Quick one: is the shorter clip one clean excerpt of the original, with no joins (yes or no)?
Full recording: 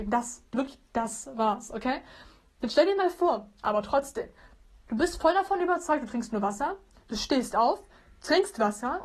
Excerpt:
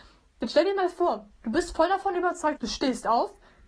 no